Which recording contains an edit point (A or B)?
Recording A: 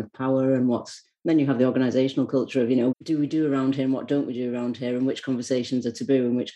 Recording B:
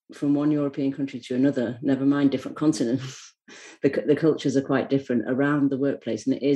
A